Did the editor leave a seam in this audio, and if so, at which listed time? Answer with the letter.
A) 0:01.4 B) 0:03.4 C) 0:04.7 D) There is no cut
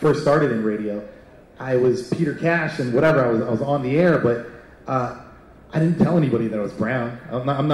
D